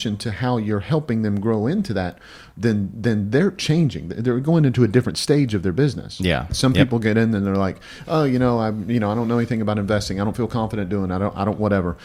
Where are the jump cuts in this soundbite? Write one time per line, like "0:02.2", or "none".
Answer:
0:06.5